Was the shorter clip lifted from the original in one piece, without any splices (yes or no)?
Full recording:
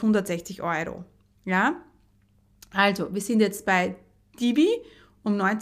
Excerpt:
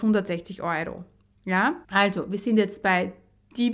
no